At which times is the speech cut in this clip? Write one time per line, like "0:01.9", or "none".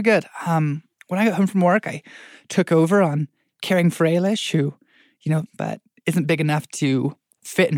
0:05.5